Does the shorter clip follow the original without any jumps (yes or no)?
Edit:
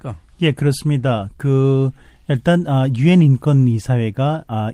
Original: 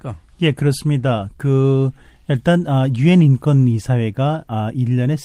yes